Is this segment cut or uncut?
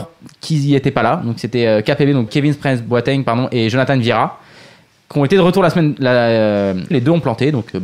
cut